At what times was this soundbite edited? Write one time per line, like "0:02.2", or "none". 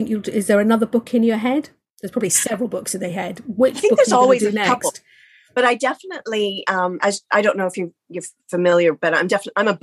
none